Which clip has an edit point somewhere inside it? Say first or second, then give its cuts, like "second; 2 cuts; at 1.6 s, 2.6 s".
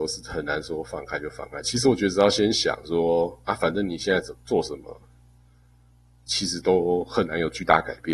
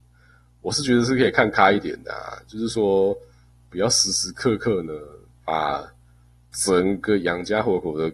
first; 1 cut; at 1.6 s